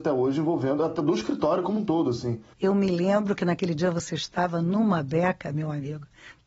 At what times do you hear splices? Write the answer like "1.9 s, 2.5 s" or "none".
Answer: none